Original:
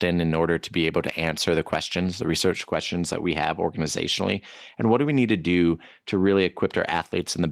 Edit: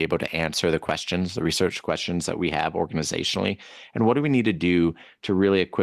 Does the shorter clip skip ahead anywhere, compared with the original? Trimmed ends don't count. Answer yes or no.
no